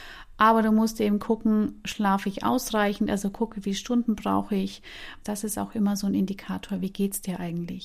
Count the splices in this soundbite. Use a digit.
1